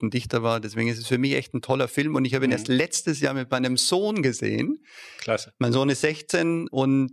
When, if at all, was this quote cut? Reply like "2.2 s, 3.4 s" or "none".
none